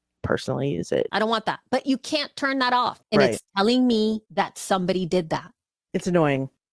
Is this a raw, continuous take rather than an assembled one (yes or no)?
no